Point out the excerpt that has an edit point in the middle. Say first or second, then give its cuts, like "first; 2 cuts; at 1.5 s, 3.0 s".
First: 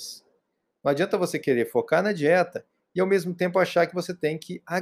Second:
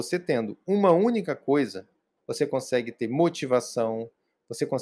second; 1 cut; at 2.2 s